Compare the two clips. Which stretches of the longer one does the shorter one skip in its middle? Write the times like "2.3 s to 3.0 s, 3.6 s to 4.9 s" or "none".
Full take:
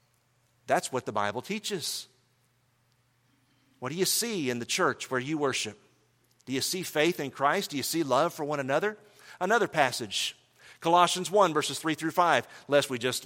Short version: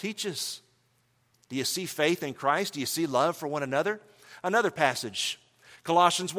2.8 s to 6.3 s